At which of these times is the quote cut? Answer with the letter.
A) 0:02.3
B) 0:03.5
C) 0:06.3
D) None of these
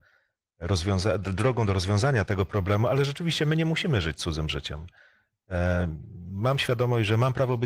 A